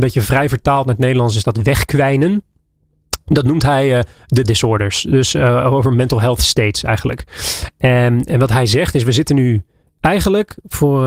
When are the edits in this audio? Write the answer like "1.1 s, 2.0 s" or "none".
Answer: 4.4 s